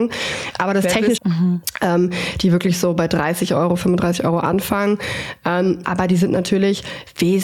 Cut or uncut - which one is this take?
cut